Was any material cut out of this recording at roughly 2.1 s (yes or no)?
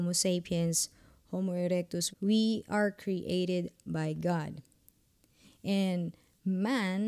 yes